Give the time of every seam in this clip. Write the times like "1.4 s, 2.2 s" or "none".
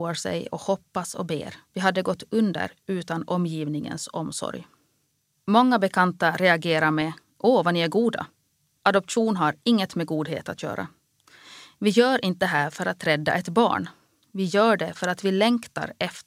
1.6 s, 8.8 s